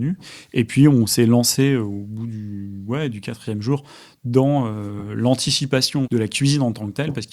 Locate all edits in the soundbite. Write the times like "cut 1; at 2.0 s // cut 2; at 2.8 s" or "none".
cut 1; at 6.0 s